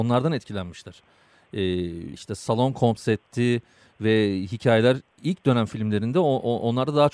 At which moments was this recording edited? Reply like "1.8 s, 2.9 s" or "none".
2.1 s